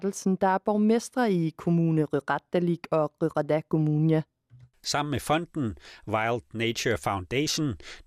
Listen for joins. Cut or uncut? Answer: uncut